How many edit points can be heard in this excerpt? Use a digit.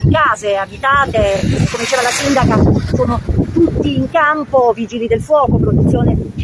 0